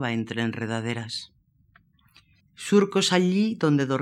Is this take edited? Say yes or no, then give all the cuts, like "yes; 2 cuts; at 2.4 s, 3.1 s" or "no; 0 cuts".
yes; 1 cut; at 2.4 s